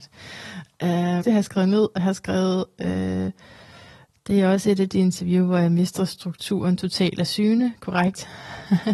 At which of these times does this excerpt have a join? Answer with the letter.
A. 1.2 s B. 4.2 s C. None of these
A